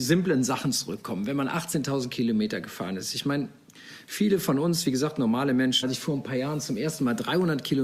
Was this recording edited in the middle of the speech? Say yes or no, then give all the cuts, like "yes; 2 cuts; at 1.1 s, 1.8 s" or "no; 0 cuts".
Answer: yes; 1 cut; at 5.8 s